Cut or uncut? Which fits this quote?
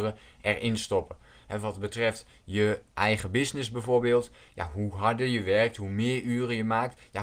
uncut